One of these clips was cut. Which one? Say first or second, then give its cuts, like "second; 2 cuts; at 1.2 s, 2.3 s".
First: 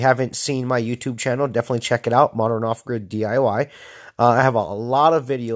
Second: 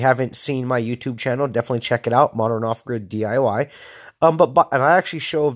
second; 1 cut; at 4.2 s